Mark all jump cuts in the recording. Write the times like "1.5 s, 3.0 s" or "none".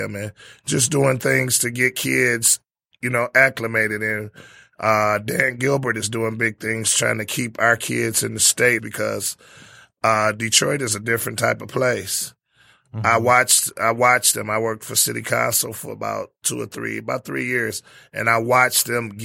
8.8 s